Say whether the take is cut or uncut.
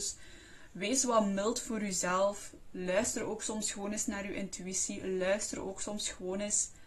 uncut